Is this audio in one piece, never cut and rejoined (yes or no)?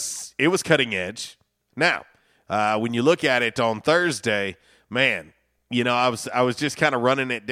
no